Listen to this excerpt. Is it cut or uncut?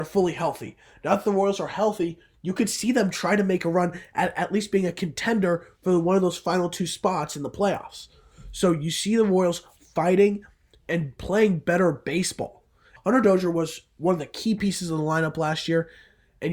cut